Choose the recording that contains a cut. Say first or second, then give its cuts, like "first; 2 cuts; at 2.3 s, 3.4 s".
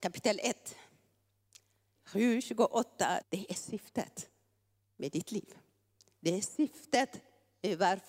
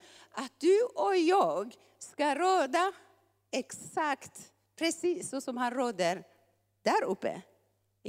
first; 2 cuts; at 2.0 s, 3.2 s